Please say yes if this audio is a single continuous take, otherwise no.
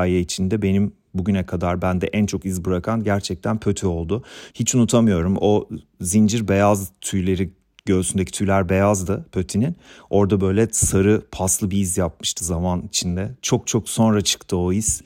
no